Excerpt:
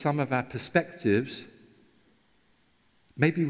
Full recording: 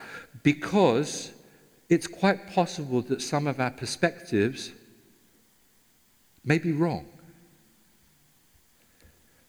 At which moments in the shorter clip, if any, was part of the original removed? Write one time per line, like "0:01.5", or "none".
none